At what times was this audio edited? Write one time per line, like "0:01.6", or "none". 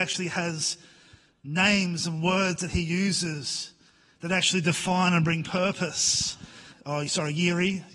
0:06.7